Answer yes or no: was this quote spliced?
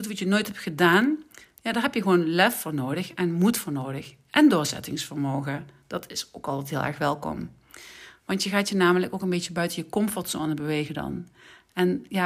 no